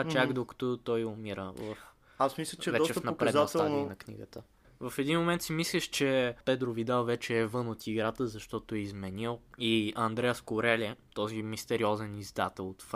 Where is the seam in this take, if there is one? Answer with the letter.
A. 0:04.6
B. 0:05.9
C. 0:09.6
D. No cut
A